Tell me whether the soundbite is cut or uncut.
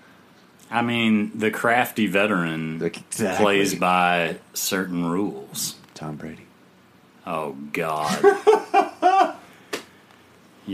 uncut